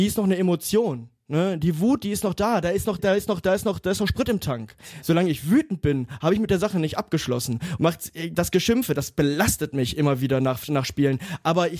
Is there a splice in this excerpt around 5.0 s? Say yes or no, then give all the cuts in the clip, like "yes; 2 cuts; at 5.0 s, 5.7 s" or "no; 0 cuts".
yes; 3 cuts; at 3.0 s, 5.0 s, 7.8 s